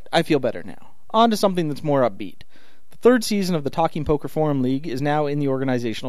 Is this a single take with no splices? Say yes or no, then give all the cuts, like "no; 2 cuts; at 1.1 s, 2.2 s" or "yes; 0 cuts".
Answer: yes; 0 cuts